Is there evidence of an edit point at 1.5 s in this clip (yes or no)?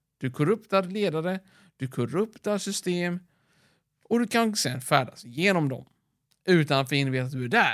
no